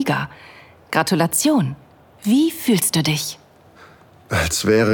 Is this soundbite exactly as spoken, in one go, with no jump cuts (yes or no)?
yes